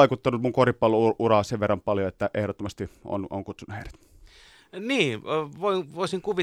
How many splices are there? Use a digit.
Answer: 0